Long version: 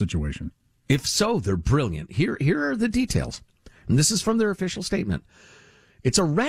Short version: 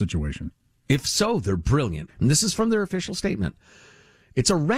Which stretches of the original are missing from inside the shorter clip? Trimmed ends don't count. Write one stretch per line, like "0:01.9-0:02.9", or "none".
0:02.1-0:03.8